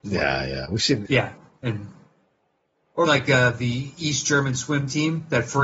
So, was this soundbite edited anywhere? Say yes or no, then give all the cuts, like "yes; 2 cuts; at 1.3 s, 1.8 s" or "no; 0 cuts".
yes; 2 cuts; at 1.1 s, 3.1 s